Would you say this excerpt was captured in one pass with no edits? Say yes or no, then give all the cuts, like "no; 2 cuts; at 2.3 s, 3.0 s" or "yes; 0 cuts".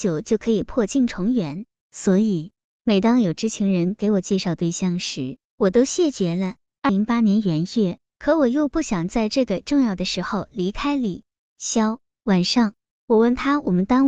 no; 2 cuts; at 6.9 s, 8.1 s